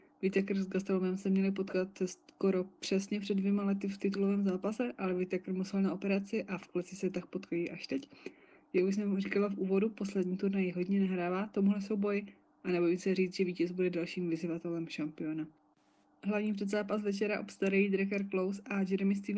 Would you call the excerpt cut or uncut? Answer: uncut